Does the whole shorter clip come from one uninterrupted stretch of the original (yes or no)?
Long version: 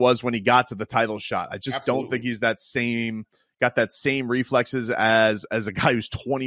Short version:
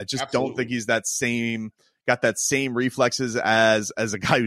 yes